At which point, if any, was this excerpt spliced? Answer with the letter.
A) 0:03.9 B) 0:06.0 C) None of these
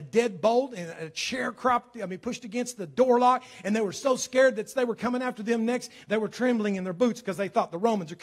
C